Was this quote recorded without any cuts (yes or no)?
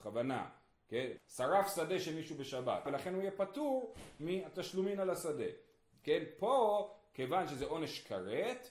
no